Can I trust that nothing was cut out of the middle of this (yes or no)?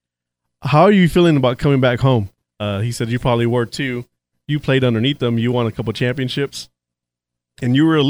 no